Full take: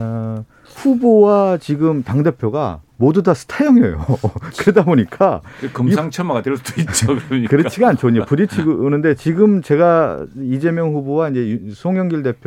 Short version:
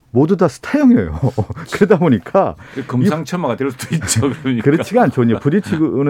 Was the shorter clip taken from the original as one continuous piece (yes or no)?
yes